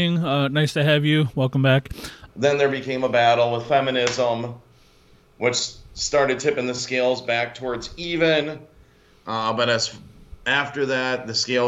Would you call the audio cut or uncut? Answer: cut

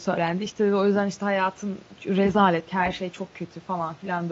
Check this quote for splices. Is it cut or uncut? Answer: cut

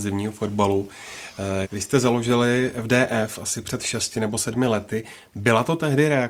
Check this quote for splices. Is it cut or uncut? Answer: cut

